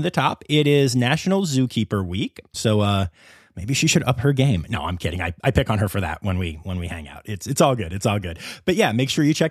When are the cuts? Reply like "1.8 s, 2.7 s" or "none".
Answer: 2.5 s